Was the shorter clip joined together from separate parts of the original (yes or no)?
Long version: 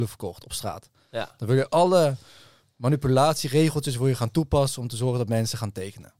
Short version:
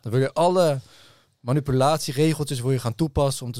no